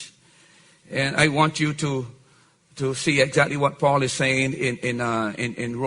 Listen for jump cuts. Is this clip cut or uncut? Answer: uncut